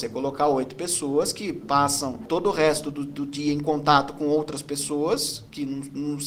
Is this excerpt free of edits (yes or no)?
yes